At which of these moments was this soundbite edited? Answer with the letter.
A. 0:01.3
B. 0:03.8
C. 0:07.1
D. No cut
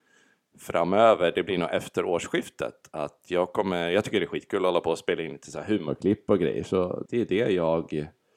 C